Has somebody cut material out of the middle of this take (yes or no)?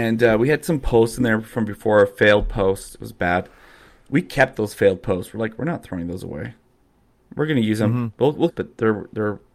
yes